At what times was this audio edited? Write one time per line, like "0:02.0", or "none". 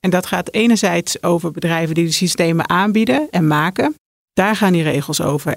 0:04.3